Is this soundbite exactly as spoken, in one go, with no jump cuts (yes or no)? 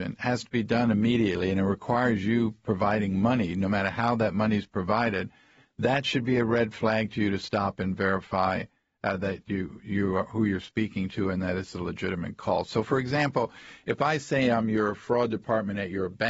yes